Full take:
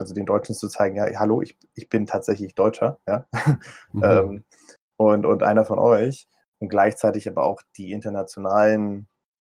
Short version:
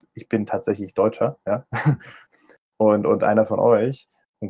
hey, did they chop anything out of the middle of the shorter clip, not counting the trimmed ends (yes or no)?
yes